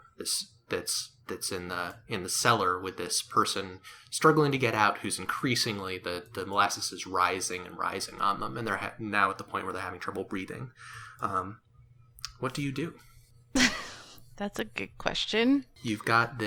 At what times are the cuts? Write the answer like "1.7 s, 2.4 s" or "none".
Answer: none